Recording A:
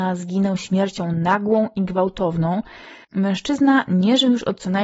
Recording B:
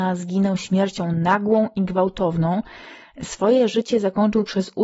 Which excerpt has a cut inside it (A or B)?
A